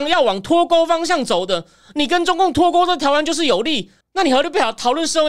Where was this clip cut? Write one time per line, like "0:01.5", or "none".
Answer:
0:04.0